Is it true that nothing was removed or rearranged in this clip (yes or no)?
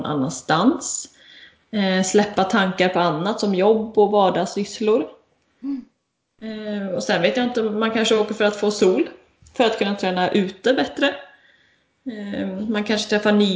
yes